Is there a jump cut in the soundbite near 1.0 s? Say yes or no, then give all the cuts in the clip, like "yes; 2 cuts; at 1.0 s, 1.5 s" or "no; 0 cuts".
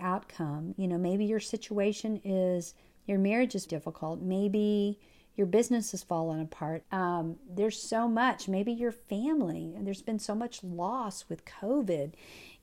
no; 2 cuts; at 3.7 s, 6.8 s